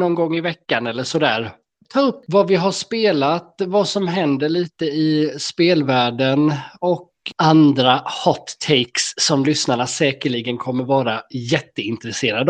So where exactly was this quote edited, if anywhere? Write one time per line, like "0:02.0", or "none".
none